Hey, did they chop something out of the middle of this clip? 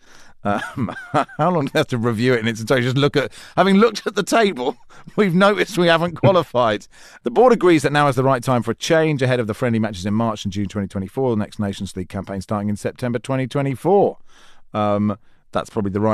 no; 0 cuts

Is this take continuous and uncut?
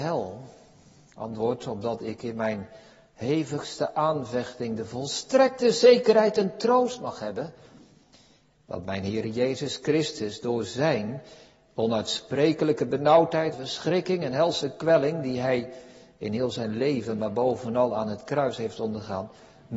no; 1 cut; at 13.5 s

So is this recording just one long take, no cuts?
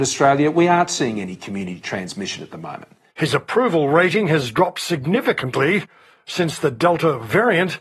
no; 1 cut; at 3.1 s

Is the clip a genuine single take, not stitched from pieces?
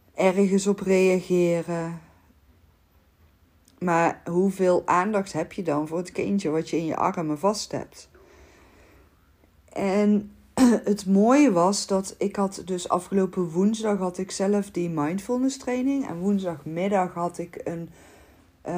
yes; 0 cuts

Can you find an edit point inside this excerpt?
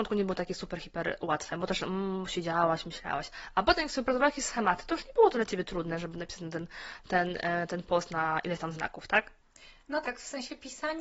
yes; 1 cut; at 10.0 s

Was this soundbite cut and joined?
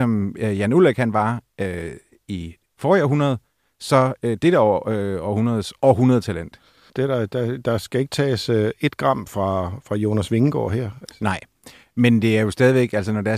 yes; 2 cuts; at 6.9 s, 11.0 s

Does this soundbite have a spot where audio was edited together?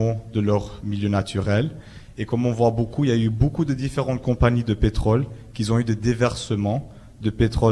no; 0 cuts

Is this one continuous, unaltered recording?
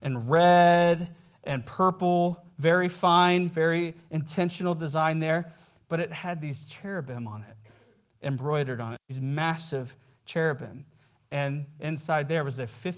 yes; 0 cuts

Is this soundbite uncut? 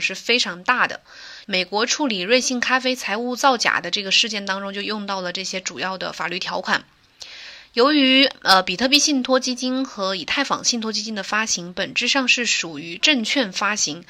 no; 1 cut; at 1.4 s

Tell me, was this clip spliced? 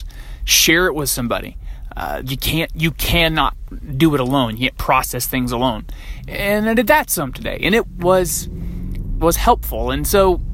yes; 3 cuts; at 2.2 s, 8.0 s, 9.2 s

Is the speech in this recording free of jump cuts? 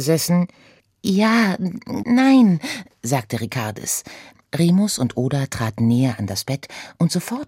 no; 2 cuts; at 2.0 s, 4.5 s

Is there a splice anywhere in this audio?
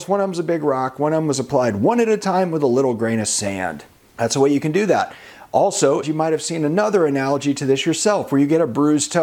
yes; 1 cut; at 6.0 s

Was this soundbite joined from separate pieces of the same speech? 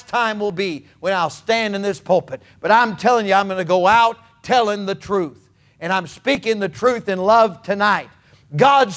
no; 0 cuts

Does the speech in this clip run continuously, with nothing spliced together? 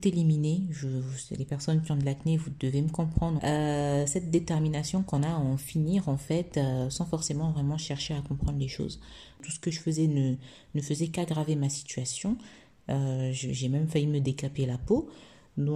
no; 2 cuts; at 3.4 s, 9.4 s

